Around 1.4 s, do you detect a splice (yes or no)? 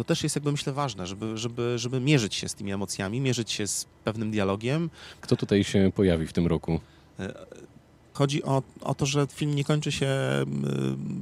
no